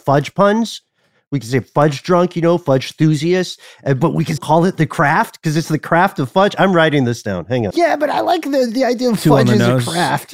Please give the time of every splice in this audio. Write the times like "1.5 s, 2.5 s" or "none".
4.4 s, 7.7 s